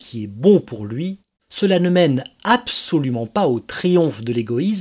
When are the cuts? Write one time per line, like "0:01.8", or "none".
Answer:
none